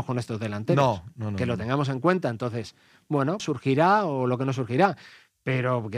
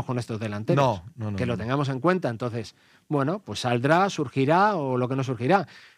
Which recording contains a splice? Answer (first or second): first